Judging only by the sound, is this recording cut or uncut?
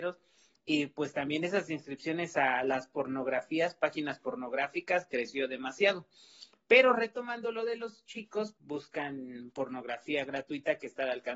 cut